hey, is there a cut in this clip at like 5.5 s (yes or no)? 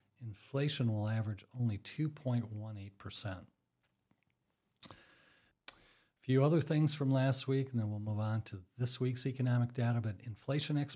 yes